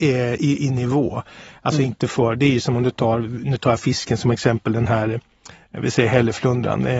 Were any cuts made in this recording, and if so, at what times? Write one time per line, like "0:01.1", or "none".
none